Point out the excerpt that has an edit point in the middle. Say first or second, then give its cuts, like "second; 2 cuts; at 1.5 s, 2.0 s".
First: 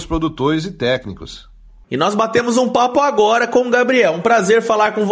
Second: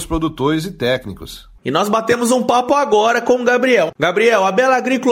second; 2 cuts; at 1.6 s, 3.9 s